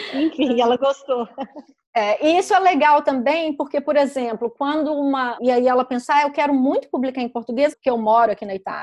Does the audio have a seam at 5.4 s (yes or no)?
yes